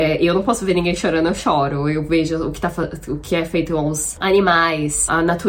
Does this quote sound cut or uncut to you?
uncut